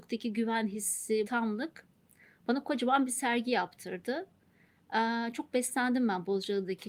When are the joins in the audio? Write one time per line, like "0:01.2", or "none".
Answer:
0:01.2